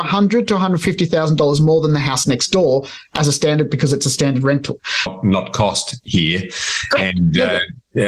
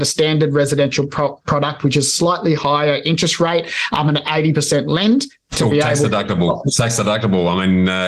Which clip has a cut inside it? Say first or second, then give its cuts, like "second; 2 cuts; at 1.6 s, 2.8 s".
first; 1 cut; at 5.1 s